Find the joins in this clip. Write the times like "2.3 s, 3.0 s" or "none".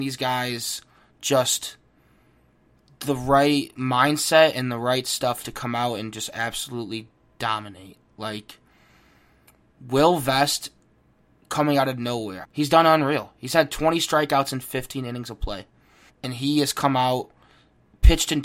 12.4 s, 16.1 s